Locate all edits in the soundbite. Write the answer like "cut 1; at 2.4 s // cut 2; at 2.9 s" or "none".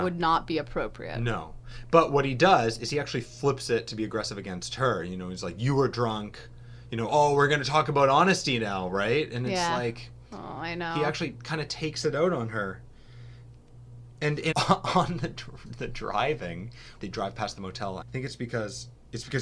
cut 1; at 14.5 s // cut 2; at 17.0 s // cut 3; at 18.0 s